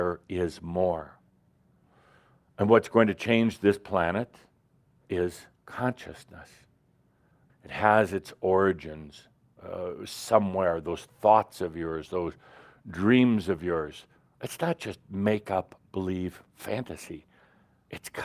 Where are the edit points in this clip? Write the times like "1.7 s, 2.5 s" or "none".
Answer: 7.5 s